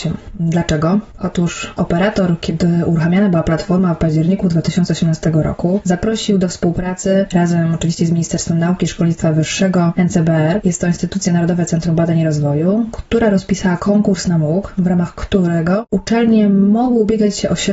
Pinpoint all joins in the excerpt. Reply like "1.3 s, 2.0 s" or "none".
none